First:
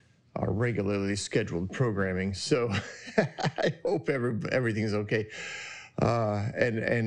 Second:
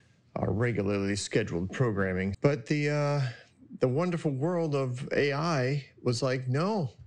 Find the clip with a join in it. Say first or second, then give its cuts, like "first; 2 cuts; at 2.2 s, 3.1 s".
second; 1 cut; at 2.3 s